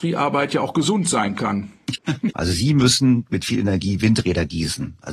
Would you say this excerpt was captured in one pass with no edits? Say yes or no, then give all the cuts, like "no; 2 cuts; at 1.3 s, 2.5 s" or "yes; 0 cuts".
no; 1 cut; at 2.3 s